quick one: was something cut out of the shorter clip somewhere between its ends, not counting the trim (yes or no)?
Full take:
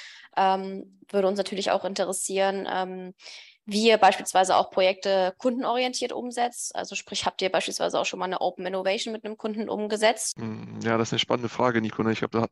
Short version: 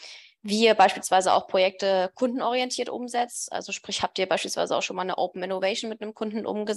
no